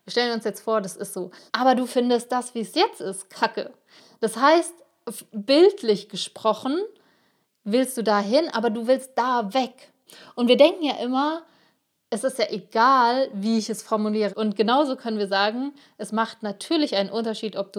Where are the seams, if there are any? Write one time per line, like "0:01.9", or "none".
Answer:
0:01.5
0:14.3

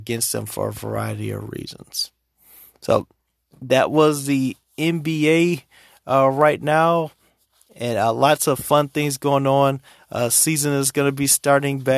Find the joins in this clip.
none

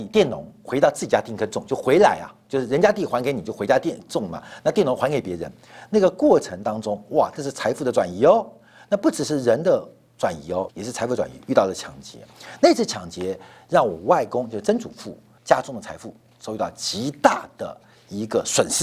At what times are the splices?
0:10.7
0:15.4

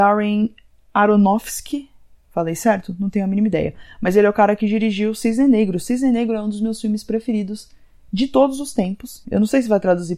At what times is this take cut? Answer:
0:09.2

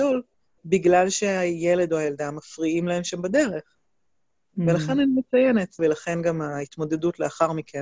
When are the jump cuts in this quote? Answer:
0:05.8

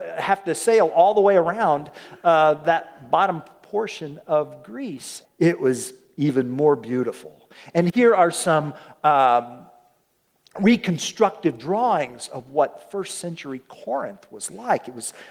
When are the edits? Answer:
0:05.2

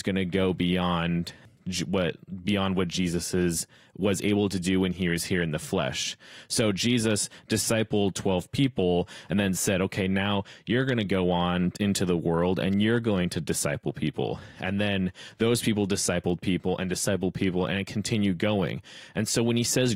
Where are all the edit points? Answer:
none

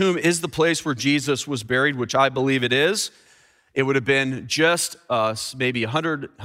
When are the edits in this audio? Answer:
none

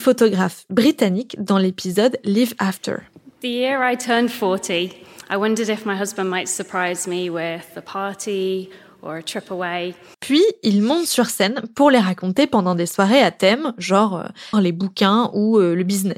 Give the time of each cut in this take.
0:10.1
0:14.5

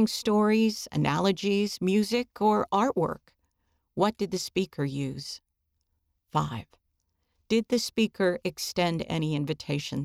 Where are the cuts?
none

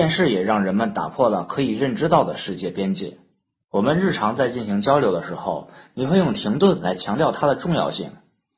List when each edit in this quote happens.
0:03.6
0:05.9

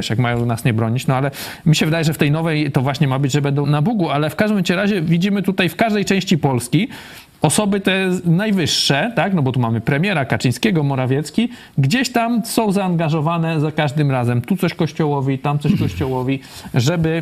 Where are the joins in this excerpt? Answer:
0:03.6

